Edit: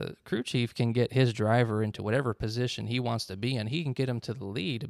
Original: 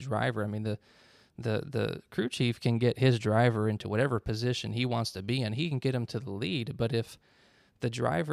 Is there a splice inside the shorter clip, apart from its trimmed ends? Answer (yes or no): no